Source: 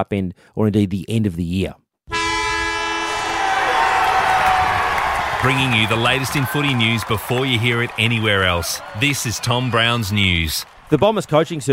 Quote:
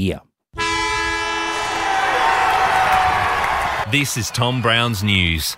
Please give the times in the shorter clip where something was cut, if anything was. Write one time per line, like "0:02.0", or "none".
0:03.8